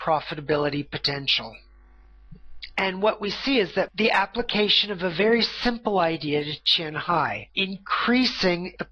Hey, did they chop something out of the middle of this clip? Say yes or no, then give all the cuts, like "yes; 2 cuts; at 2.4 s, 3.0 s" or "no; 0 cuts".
no; 0 cuts